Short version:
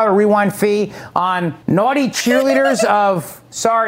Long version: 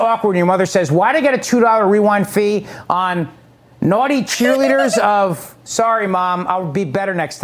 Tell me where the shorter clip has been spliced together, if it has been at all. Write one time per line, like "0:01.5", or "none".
0:01.6